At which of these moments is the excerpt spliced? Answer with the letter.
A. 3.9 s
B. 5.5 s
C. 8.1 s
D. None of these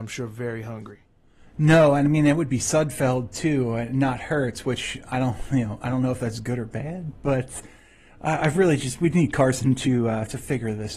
D